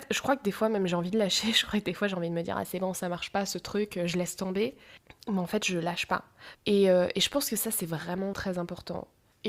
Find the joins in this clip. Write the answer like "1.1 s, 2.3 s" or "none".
6.5 s, 8.3 s